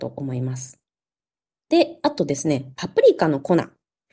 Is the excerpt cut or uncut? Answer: uncut